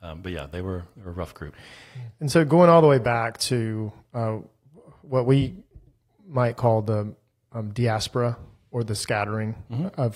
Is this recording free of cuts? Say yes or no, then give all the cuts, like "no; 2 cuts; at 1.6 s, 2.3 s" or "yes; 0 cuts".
yes; 0 cuts